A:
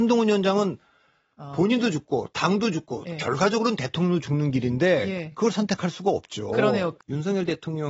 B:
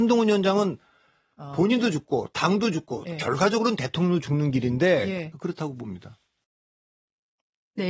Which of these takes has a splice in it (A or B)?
B